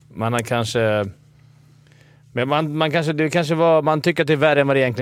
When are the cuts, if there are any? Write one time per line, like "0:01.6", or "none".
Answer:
none